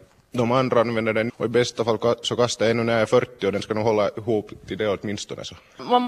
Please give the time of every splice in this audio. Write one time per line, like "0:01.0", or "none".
0:01.3